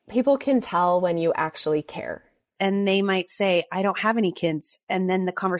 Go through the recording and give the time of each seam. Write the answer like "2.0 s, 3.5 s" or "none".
2.6 s